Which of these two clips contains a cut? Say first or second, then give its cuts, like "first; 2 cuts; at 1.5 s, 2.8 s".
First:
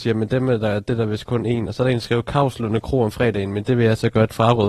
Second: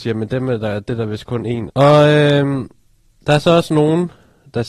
second; 1 cut; at 1.7 s